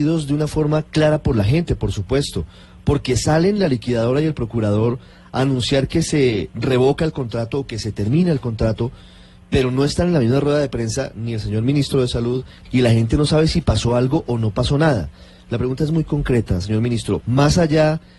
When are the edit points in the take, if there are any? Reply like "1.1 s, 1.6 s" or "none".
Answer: 12.6 s, 17.2 s